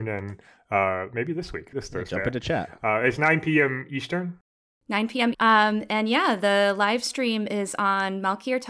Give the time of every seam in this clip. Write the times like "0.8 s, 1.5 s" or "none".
1.7 s, 5.3 s